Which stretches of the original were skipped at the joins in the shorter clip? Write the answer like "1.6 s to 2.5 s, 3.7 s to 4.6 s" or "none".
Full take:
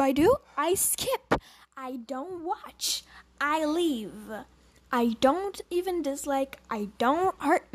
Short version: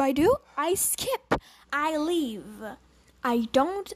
1.6 s to 3.3 s